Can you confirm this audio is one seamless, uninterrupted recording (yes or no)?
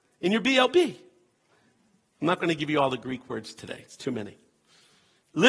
yes